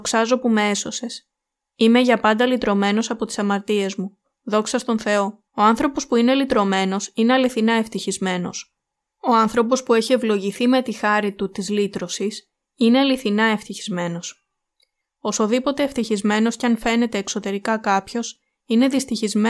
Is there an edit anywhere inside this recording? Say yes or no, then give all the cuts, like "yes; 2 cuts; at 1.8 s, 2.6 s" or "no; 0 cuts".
yes; 2 cuts; at 5.5 s, 15.0 s